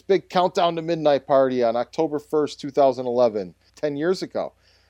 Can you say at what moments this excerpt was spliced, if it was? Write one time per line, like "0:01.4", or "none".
0:03.7